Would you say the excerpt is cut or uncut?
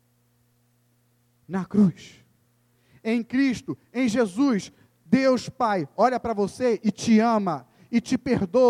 cut